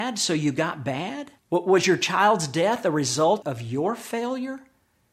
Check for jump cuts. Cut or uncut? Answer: cut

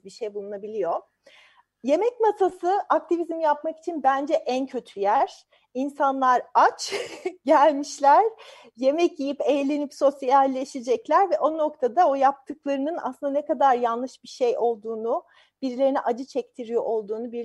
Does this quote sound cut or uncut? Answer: uncut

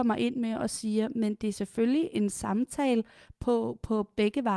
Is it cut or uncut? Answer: uncut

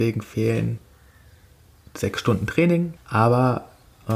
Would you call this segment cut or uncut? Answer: cut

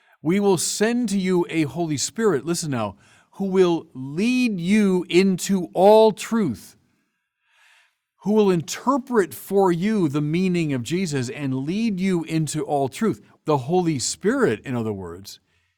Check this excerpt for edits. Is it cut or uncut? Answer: cut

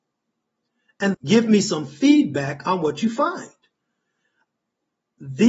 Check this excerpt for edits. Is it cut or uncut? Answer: cut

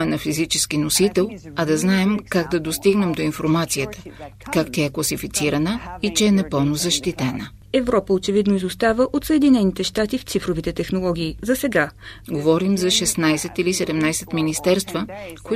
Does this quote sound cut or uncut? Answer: cut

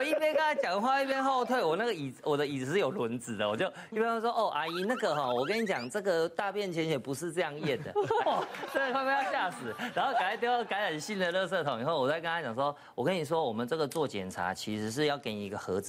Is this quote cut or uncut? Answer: cut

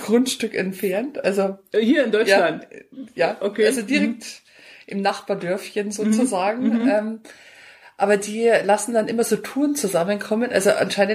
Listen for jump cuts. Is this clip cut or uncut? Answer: uncut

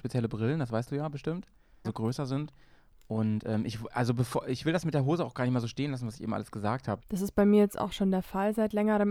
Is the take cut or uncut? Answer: cut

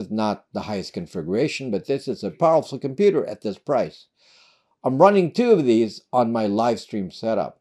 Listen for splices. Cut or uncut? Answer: cut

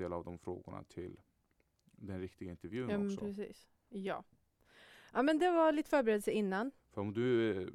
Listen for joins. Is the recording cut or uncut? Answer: cut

